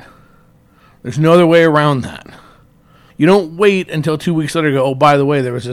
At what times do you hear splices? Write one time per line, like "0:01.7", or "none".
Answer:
0:03.1